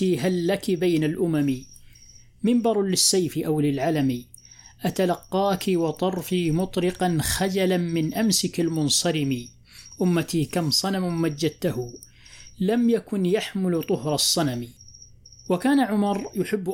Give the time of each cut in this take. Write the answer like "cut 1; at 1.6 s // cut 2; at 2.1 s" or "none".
none